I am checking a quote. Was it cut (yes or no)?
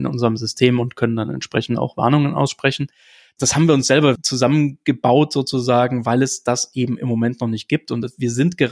no